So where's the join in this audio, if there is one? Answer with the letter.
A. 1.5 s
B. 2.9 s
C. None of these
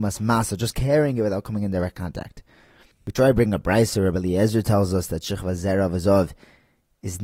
B